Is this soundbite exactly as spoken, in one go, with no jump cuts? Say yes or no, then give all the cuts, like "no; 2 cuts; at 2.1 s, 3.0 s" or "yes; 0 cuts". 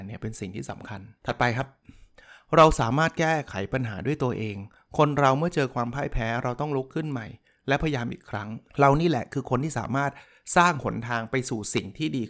no; 2 cuts; at 1.2 s, 8.7 s